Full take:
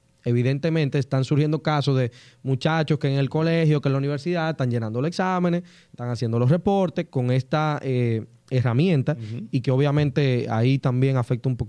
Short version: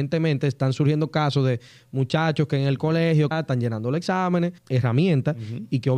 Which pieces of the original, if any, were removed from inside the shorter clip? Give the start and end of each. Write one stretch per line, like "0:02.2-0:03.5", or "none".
0:03.8-0:04.4
0:05.7-0:08.4